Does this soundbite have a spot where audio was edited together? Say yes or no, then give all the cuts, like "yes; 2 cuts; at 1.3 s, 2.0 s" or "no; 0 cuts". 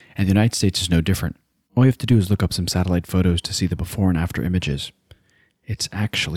no; 0 cuts